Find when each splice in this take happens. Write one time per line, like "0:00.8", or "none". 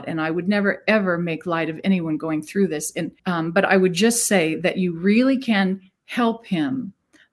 0:03.2